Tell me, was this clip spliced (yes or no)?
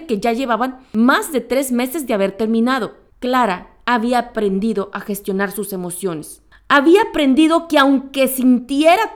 no